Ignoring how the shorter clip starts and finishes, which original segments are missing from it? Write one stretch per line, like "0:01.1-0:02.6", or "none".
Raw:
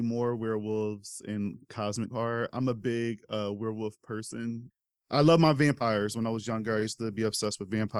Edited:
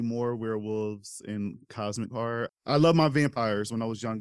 0:02.5-0:04.9